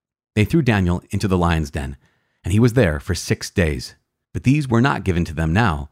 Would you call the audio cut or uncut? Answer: cut